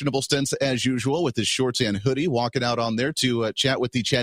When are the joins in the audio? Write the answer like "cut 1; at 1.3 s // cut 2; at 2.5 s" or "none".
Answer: none